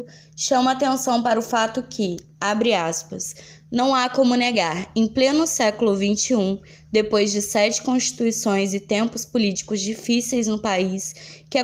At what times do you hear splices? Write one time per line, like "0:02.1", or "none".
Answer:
none